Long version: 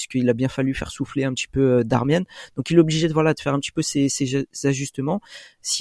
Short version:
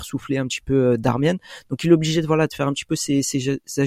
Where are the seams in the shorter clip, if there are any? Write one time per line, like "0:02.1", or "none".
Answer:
none